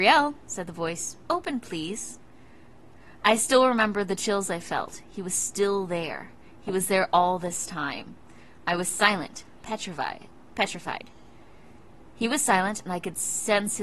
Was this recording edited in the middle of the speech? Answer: no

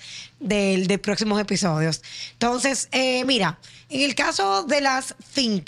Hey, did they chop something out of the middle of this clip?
no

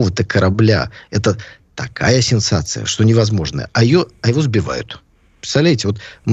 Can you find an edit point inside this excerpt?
no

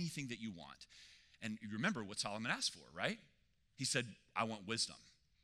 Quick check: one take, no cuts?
yes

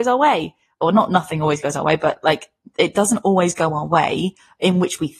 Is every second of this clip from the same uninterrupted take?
yes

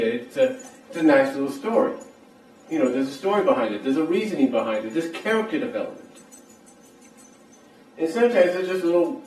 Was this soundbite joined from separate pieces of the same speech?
no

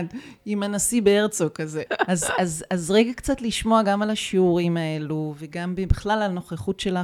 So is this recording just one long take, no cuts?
no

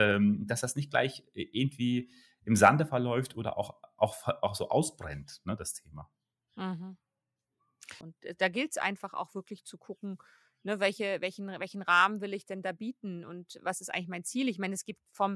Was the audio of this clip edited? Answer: yes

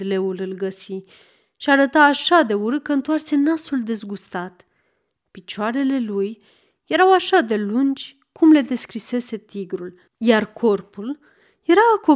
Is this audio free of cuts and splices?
no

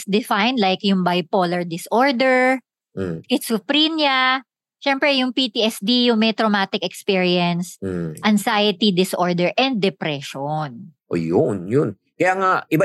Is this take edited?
no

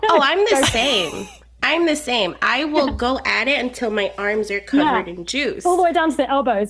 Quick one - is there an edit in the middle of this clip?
no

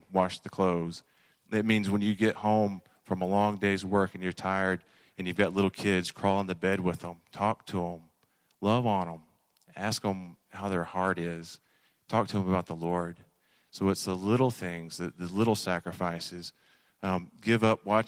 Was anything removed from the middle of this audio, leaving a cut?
no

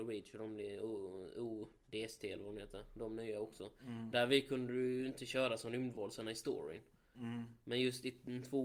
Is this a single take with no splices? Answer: yes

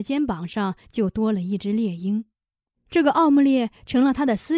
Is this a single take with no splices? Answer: no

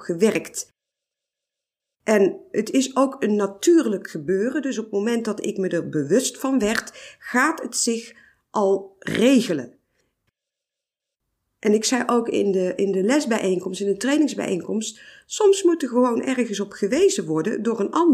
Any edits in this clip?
no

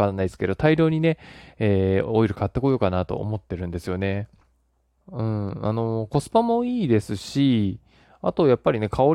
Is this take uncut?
no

